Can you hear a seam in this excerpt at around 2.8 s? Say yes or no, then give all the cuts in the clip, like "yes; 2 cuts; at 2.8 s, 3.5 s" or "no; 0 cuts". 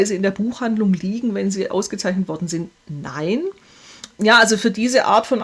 no; 1 cut; at 4.1 s